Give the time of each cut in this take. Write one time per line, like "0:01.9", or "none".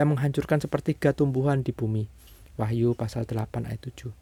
none